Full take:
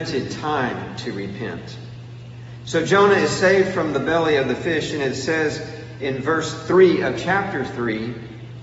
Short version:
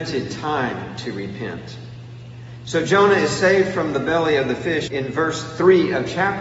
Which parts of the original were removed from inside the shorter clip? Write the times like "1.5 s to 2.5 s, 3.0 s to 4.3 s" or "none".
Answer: 4.9 s to 6.0 s